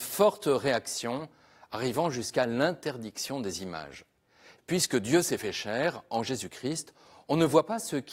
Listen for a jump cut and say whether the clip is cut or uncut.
cut